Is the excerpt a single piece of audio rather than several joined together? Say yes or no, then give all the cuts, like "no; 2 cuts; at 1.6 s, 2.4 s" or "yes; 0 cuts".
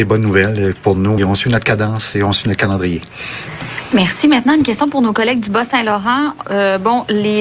no; 1 cut; at 1.2 s